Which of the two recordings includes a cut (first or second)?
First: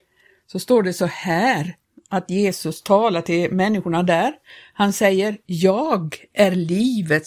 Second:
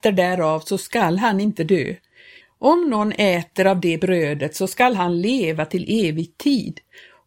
second